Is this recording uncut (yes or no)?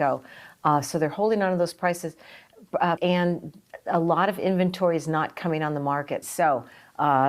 no